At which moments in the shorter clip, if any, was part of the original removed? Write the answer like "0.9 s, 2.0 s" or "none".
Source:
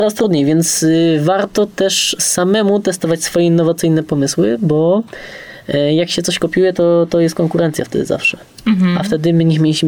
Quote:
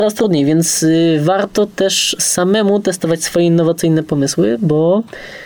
none